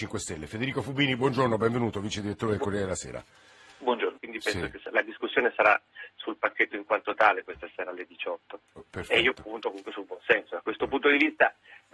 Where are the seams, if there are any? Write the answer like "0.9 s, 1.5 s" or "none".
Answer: 4.2 s, 8.7 s